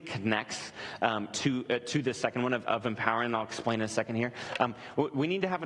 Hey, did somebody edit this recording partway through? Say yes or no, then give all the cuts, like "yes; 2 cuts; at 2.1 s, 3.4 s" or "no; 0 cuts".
no; 0 cuts